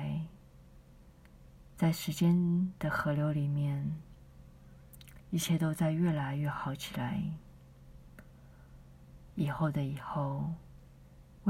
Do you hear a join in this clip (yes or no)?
yes